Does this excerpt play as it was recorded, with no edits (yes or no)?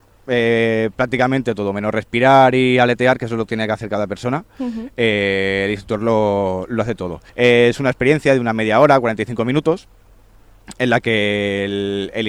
no